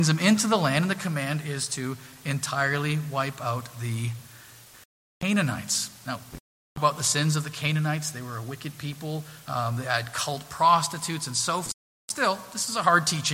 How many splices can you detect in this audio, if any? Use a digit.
1